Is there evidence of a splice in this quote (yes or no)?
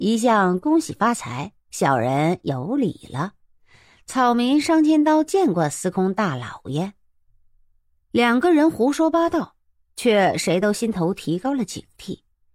no